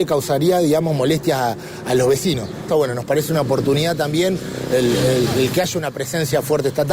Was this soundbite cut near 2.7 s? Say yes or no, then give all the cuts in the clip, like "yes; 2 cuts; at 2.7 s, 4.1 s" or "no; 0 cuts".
yes; 1 cut; at 2.7 s